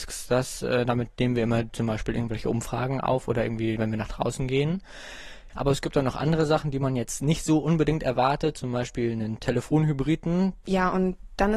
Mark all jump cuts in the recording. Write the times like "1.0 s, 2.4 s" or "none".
3.8 s, 5.5 s, 10.6 s

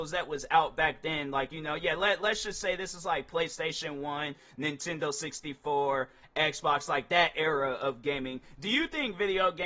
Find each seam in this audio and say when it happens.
none

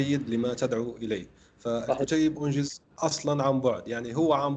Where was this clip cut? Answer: 2.9 s

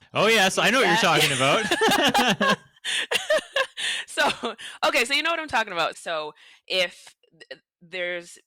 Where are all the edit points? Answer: 5.9 s

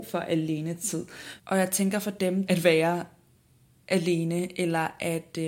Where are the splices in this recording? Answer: 1.4 s, 2.5 s

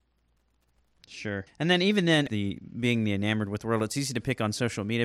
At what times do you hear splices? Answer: 2.3 s

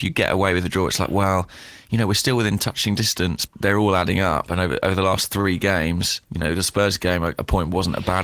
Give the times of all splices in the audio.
3.5 s, 6.2 s

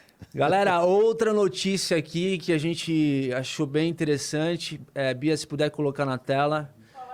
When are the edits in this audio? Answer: none

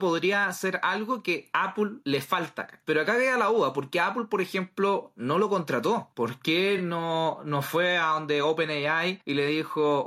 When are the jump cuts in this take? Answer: none

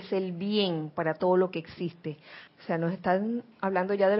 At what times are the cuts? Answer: 2.5 s

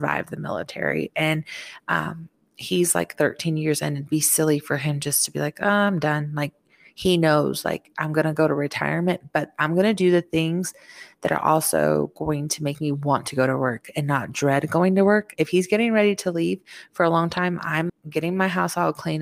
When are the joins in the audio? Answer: 15.4 s, 17.9 s

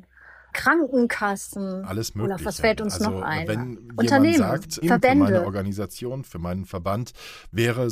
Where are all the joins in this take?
4.8 s

